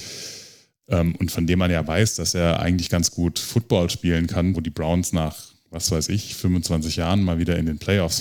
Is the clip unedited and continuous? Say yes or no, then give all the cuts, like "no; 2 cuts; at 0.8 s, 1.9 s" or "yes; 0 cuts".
no; 1 cut; at 4.5 s